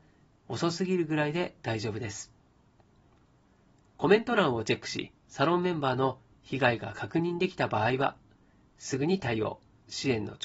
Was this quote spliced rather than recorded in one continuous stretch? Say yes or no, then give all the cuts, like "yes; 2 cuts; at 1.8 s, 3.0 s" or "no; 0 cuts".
yes; 1 cut; at 5.2 s